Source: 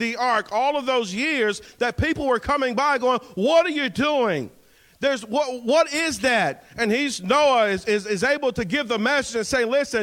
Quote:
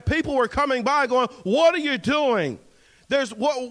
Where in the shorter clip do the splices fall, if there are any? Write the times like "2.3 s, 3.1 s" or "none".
none